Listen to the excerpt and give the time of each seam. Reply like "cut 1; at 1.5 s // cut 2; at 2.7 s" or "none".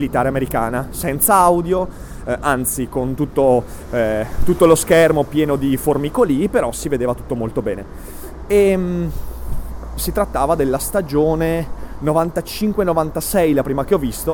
none